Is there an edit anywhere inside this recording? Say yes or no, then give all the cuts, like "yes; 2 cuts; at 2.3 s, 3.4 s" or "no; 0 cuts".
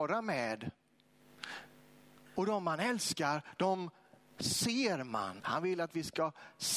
yes; 1 cut; at 5.4 s